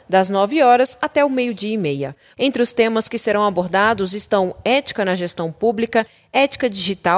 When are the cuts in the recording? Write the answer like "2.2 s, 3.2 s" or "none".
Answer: 2.3 s